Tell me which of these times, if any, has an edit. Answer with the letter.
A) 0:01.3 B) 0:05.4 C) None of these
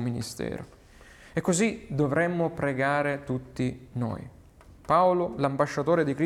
C